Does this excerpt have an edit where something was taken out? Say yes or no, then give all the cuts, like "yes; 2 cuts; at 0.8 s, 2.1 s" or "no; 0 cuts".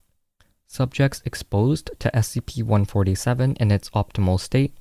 no; 0 cuts